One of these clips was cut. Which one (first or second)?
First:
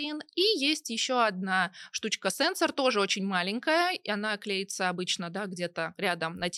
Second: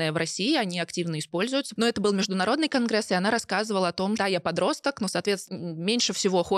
second